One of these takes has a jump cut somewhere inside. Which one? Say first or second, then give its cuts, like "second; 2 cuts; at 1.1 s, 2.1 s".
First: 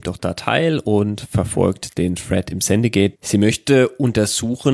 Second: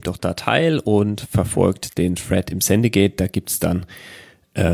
first; 1 cut; at 3.1 s